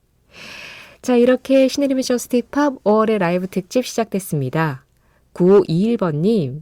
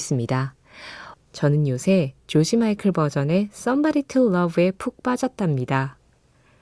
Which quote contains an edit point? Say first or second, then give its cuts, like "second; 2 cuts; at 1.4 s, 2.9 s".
second; 1 cut; at 1.1 s